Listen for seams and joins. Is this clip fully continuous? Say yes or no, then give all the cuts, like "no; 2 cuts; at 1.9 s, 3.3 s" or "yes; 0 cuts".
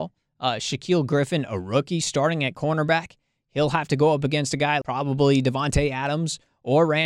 no; 1 cut; at 4.8 s